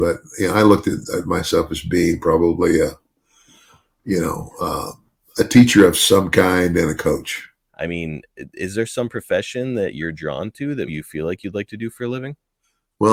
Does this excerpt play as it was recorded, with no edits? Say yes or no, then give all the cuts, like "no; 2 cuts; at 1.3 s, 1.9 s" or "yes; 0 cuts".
no; 2 cuts; at 7.7 s, 10.9 s